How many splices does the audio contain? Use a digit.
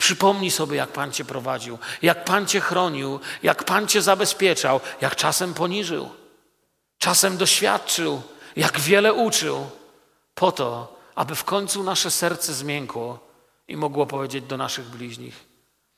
0